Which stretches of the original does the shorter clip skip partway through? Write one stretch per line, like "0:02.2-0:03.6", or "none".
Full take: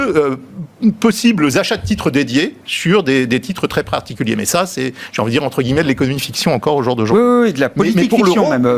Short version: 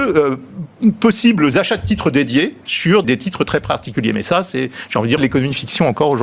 0:03.0-0:03.3
0:05.4-0:05.8